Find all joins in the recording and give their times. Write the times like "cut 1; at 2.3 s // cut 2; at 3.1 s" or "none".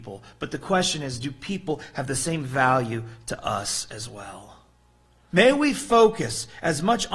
cut 1; at 5.3 s